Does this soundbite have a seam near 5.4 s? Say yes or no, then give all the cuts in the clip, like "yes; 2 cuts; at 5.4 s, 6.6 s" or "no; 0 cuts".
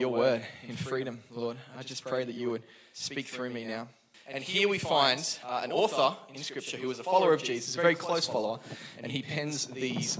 no; 1 cut; at 4.1 s